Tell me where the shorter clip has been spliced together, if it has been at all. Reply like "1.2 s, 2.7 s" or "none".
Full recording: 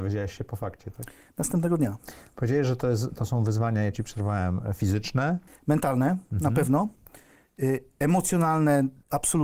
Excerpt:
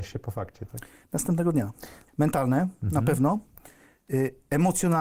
2.1 s